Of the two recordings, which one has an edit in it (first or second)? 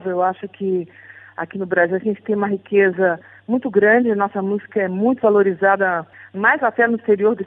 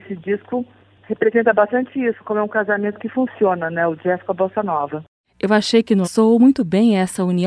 second